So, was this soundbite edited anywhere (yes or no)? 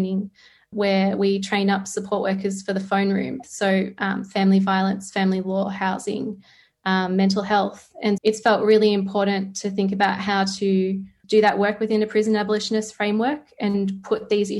yes